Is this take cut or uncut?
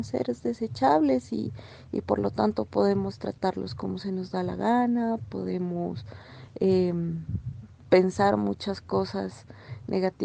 uncut